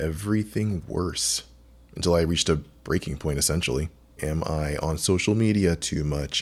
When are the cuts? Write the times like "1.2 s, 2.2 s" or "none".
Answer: 4.2 s